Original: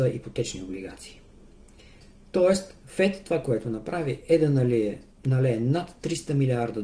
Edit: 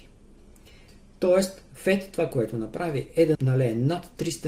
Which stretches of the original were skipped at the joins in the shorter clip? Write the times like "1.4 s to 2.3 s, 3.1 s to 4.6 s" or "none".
4.5 s to 5.2 s